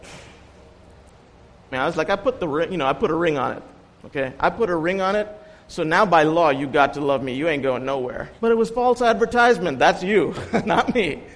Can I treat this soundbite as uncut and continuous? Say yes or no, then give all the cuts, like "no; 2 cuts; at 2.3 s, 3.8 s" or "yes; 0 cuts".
no; 2 cuts; at 1.7 s, 8.4 s